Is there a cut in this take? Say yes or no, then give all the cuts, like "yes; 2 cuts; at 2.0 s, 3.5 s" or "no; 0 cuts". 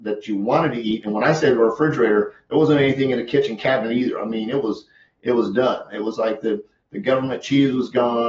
no; 0 cuts